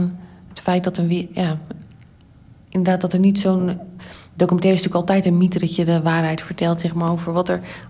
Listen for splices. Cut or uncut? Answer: uncut